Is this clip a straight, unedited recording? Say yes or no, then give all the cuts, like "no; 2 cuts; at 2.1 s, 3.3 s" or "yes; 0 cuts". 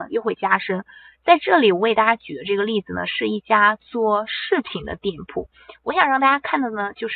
yes; 0 cuts